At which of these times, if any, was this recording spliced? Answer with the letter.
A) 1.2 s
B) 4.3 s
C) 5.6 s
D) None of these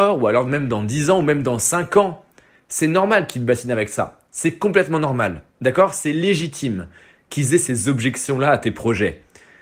D